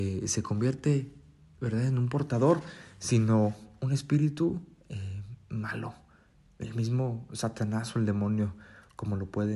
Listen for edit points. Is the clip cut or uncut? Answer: uncut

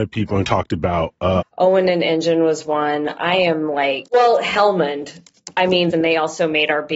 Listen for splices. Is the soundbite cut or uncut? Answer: cut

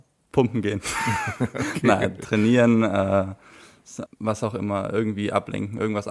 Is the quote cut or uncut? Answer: cut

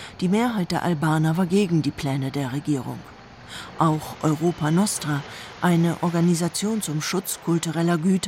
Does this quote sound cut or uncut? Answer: uncut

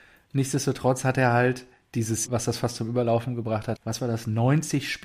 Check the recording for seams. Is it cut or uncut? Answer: cut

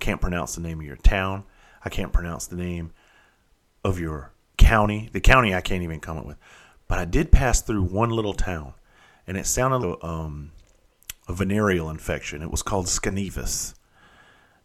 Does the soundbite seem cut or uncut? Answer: cut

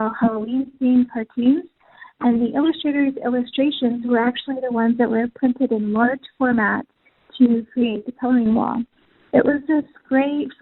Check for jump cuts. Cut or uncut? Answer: uncut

